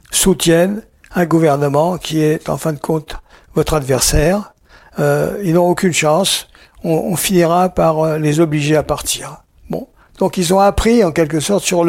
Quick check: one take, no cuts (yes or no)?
yes